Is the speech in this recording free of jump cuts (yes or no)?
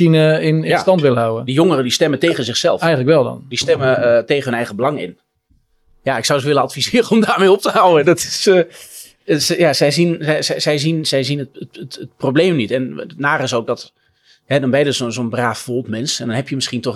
yes